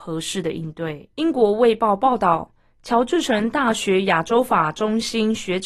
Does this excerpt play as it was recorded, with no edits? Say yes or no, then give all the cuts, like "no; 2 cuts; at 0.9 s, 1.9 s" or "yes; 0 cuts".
no; 1 cut; at 1.1 s